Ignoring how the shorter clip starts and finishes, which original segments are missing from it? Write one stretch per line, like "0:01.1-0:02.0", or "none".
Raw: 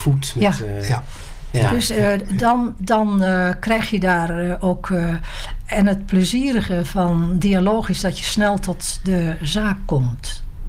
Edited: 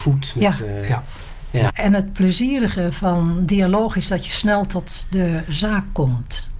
0:01.7-0:05.6